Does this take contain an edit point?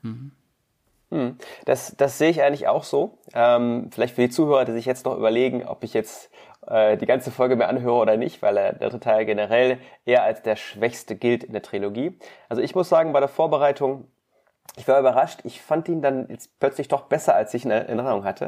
no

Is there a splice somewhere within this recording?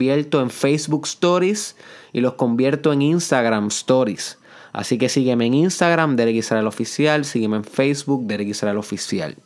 no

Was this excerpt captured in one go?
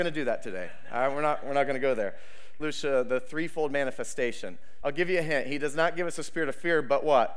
no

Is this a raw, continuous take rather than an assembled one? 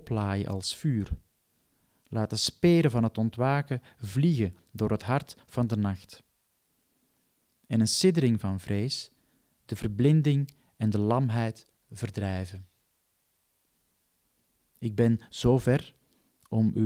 yes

